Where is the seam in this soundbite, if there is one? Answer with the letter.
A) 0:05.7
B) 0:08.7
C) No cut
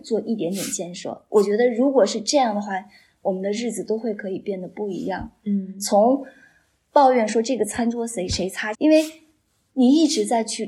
B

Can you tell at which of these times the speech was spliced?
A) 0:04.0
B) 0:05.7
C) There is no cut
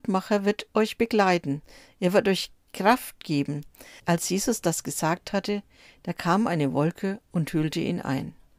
A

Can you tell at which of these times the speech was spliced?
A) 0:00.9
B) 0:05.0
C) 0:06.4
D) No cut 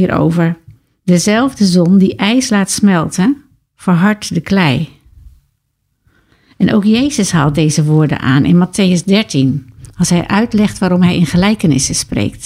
D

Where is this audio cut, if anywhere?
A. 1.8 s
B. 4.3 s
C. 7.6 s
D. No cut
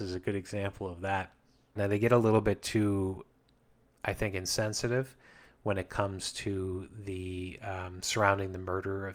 A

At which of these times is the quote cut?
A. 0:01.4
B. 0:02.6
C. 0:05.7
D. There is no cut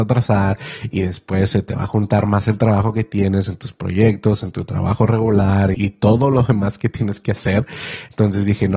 C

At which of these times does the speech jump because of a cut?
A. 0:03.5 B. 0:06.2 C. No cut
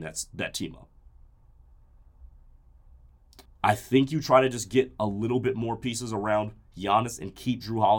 A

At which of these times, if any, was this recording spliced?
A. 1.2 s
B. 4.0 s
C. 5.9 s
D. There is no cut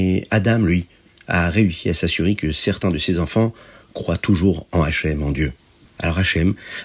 C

